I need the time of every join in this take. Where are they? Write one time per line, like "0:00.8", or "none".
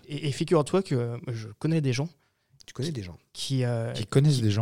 none